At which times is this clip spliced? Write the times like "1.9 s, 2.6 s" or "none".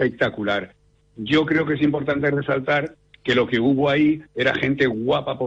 none